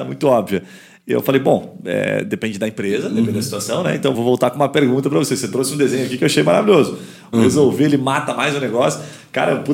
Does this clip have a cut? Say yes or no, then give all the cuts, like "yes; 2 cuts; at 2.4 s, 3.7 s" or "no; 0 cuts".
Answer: yes; 2 cuts; at 4.1 s, 7.3 s